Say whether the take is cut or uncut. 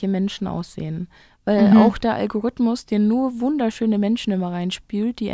uncut